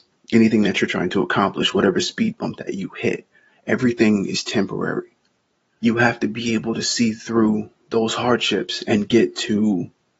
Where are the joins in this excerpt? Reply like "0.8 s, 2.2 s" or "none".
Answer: 5.8 s